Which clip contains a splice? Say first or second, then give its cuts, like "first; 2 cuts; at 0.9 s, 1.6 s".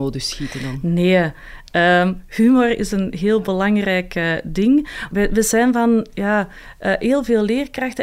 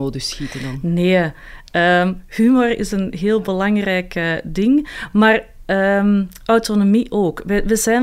first; 1 cut; at 5.1 s